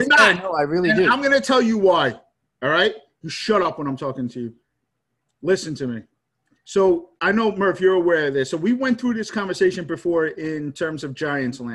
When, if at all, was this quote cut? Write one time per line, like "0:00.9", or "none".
none